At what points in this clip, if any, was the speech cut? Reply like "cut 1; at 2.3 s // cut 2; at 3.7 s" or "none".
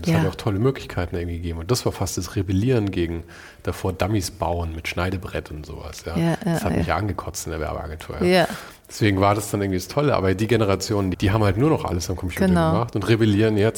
cut 1; at 11.1 s